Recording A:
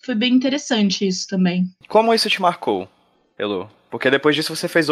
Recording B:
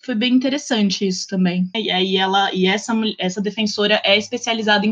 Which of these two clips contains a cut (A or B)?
B